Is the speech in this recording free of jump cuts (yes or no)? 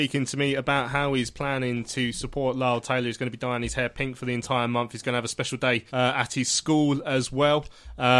no